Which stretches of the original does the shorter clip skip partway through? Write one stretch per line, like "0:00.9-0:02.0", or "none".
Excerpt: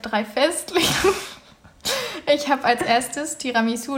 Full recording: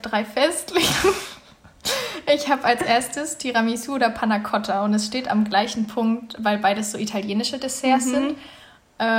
none